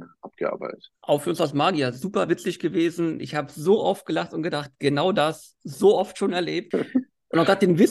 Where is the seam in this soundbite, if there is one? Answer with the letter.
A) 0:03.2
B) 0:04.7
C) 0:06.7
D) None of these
D